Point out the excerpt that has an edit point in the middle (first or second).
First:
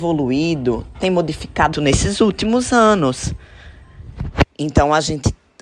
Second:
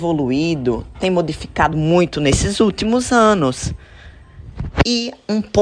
first